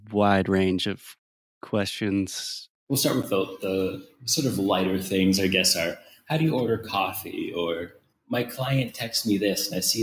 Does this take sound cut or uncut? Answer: cut